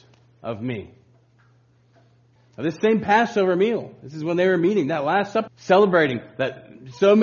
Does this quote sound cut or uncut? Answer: cut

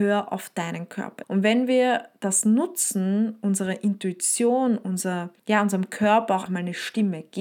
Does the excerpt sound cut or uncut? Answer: cut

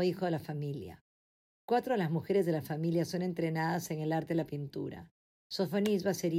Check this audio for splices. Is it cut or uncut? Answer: uncut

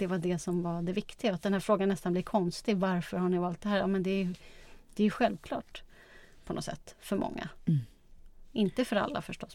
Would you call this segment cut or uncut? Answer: uncut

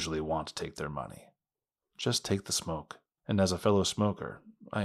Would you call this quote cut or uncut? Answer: cut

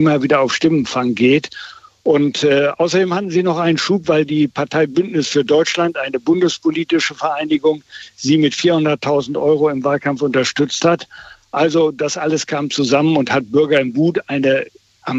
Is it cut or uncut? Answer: uncut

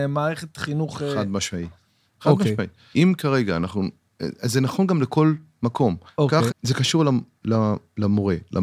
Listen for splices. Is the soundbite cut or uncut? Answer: cut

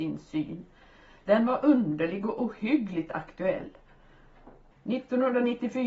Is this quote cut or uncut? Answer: cut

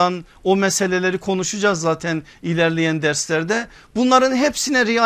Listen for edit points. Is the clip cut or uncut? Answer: uncut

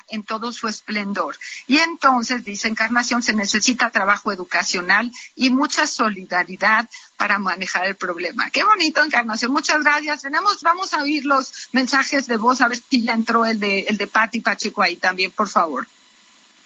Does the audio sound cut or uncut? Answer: cut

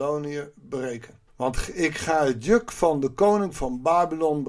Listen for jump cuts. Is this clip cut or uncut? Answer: cut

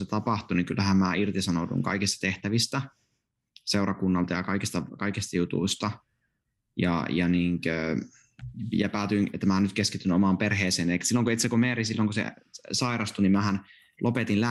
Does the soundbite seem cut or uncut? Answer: uncut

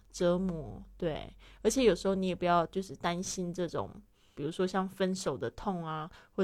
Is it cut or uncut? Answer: cut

